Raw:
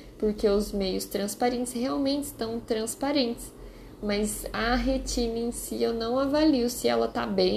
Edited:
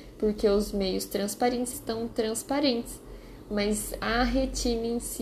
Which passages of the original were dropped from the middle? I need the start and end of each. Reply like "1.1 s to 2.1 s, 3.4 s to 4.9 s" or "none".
1.7 s to 2.3 s